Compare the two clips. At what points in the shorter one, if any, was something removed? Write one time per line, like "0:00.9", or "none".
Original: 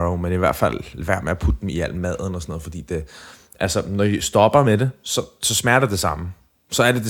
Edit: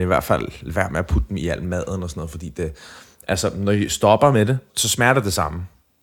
0:04.7